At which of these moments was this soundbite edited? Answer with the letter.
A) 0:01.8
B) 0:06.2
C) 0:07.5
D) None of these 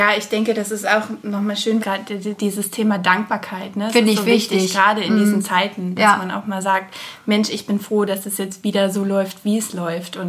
A